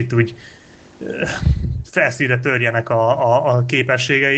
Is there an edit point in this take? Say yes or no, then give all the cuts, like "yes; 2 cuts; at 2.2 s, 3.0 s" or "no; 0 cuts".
no; 0 cuts